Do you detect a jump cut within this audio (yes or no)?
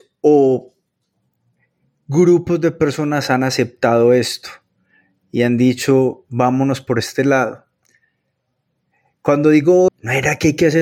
yes